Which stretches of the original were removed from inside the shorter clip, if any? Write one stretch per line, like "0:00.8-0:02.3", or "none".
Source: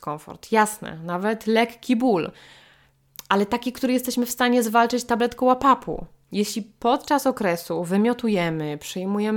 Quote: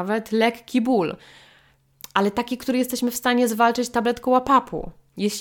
none